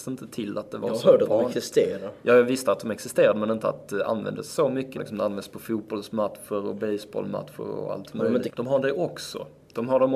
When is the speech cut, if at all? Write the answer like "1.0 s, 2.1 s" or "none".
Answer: 5.0 s, 8.5 s